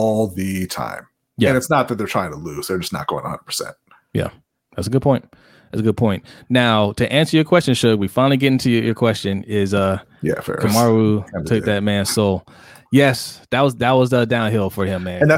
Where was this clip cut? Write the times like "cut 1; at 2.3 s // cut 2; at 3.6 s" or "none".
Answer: none